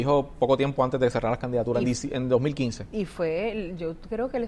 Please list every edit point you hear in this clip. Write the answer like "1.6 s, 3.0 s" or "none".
none

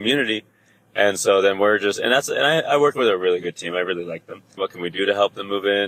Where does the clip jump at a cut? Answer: 4.6 s

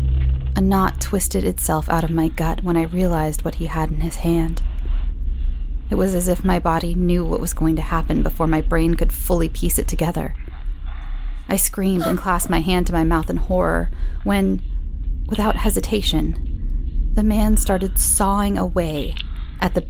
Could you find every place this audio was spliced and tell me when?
none

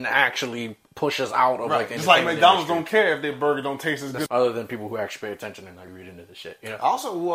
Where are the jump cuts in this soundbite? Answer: 4.3 s, 5.9 s

